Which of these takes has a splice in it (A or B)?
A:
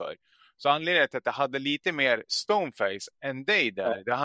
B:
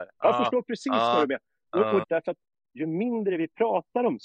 B